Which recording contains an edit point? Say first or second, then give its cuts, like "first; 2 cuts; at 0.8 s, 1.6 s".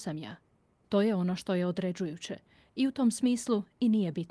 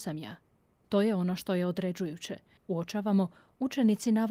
second; 1 cut; at 2.6 s